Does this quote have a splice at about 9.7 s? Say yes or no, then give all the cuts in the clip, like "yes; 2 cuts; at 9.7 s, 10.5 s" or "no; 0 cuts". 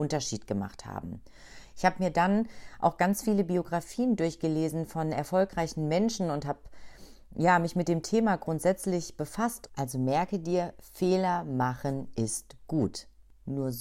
yes; 1 cut; at 9.7 s